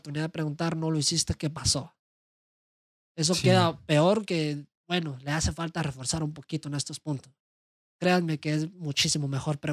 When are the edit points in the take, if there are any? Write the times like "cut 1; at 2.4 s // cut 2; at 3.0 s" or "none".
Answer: none